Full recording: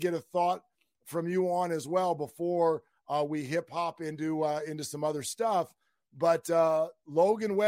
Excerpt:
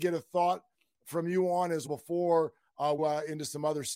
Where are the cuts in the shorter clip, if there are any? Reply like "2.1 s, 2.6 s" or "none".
1.9 s, 3.0 s

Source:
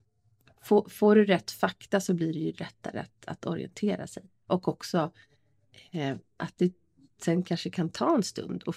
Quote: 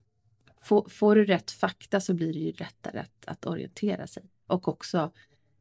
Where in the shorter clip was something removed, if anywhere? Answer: none

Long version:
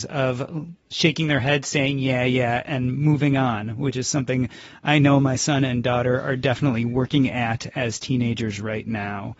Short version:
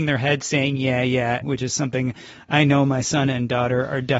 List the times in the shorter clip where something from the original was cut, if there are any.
1.4 s

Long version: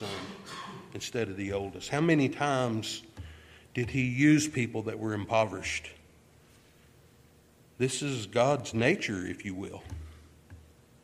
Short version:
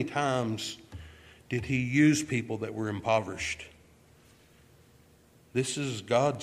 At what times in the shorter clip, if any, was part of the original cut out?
none

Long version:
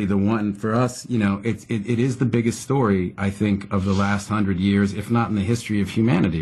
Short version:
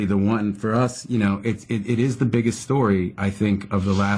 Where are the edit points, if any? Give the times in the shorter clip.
none

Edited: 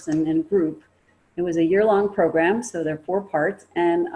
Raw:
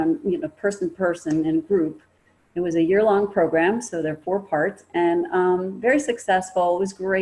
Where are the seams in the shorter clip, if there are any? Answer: none

